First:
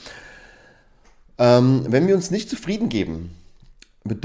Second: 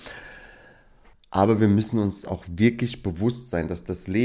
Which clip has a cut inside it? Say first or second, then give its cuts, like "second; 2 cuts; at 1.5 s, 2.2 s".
second; 1 cut; at 1.1 s